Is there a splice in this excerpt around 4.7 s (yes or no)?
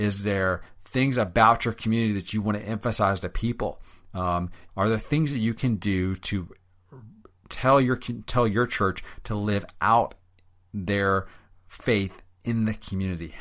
yes